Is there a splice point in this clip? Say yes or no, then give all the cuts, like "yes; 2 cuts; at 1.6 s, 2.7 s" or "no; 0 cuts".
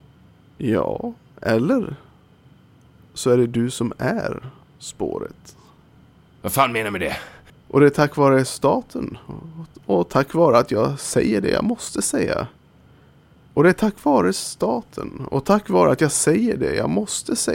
yes; 1 cut; at 7.5 s